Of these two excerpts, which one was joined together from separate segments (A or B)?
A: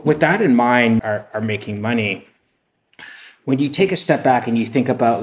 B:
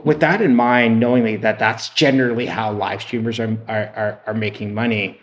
A